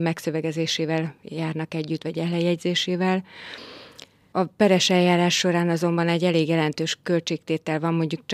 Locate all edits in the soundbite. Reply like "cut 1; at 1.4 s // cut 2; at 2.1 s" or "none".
none